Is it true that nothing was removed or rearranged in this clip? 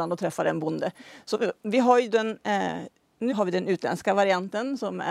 no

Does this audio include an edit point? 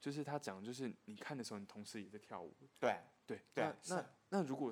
yes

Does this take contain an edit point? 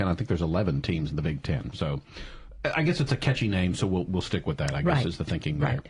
no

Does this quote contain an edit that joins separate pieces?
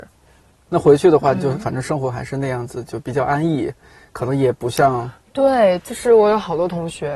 no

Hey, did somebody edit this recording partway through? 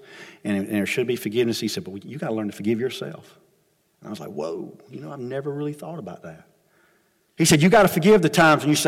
no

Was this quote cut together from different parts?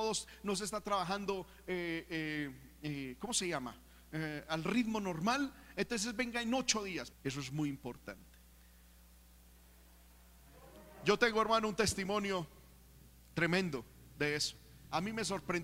yes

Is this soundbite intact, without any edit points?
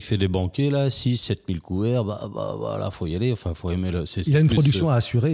yes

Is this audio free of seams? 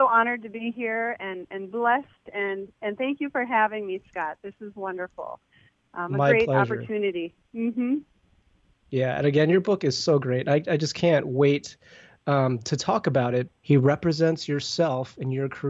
no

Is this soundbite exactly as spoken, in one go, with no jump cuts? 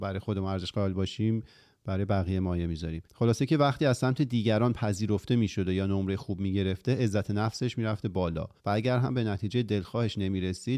no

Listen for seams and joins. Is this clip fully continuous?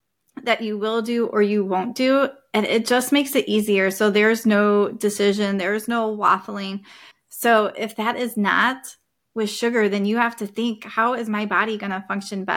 no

